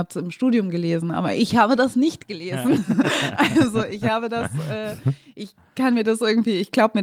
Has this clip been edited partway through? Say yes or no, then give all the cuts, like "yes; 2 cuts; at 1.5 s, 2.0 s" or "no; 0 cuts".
no; 0 cuts